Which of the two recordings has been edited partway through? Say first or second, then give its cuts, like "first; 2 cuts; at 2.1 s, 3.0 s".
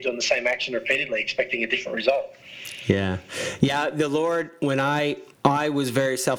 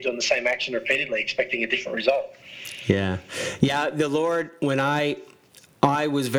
first; 1 cut; at 5.3 s